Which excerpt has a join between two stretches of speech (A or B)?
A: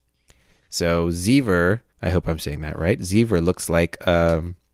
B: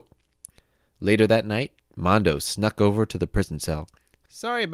A